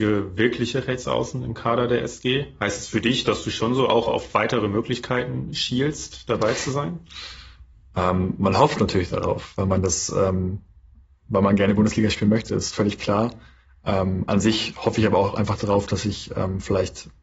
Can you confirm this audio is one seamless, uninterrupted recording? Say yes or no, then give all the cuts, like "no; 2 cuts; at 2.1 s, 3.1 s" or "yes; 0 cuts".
yes; 0 cuts